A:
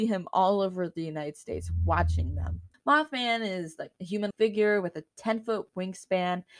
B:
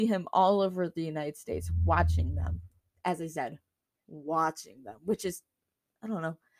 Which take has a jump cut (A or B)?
A